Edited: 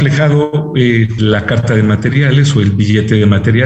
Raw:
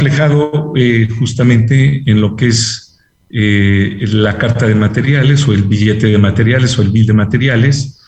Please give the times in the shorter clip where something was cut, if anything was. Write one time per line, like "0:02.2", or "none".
0:01.2